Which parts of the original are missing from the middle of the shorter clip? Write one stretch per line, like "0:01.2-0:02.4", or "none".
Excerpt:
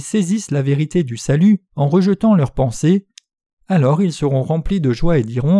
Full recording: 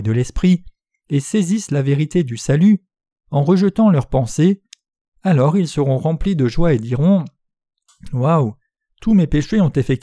0:02.9-0:03.2

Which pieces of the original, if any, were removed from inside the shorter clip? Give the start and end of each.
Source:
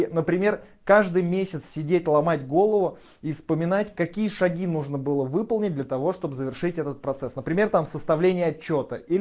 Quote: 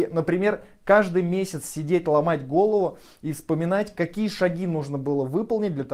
none

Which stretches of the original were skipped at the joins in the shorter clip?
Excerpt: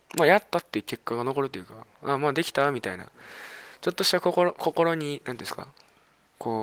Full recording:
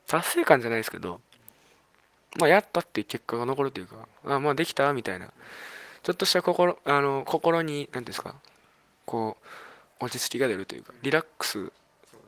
0:06.8-0:07.2

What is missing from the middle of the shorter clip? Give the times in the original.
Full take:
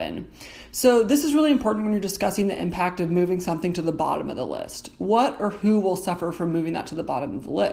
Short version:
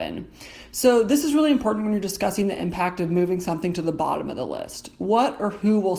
none

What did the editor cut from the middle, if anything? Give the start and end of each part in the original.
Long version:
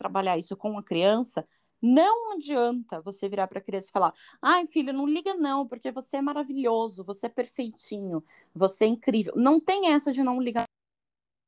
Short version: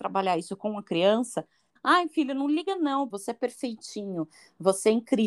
0:01.8-0:04.3
0:05.7-0:07.1

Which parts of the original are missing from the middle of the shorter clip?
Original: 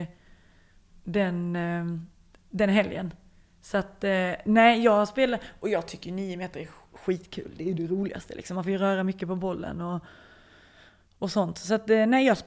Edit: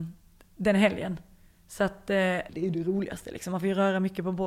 0:04.4-0:07.5

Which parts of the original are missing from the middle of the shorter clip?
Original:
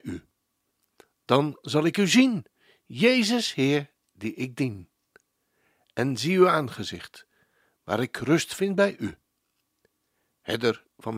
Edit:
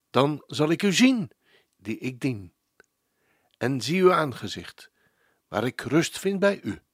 0:02.8-0:04.0

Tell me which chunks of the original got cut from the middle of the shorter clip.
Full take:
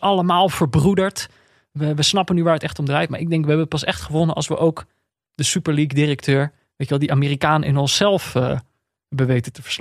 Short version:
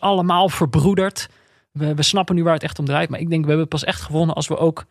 none

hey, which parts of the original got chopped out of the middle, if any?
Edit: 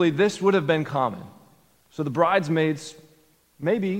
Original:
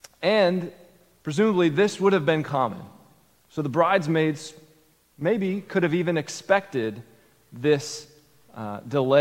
none

